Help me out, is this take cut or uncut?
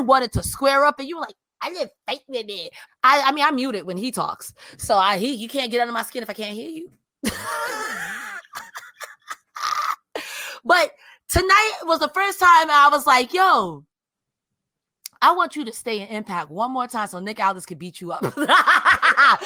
cut